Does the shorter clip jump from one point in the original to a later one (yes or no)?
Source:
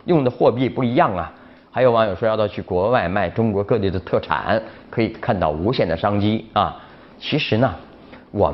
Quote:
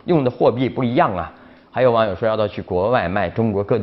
no